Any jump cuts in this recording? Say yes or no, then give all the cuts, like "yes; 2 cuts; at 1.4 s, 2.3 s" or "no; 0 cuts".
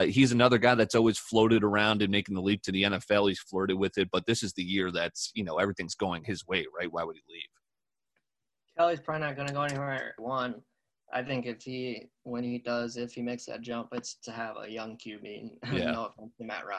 yes; 1 cut; at 10.2 s